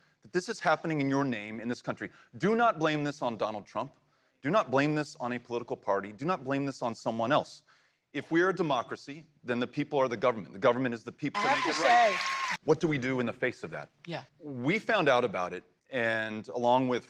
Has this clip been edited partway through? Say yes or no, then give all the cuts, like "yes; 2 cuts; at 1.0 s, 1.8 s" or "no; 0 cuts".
yes; 3 cuts; at 11.3 s, 12.6 s, 14.3 s